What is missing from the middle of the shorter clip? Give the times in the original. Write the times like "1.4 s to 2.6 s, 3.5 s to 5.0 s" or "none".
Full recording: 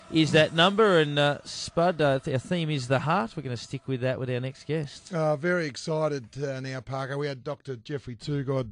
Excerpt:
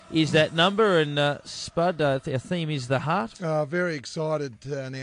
3.3 s to 5.1 s